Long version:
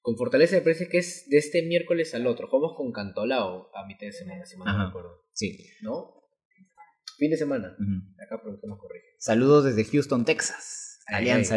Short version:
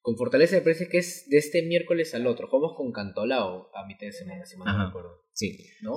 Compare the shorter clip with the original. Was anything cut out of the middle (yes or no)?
no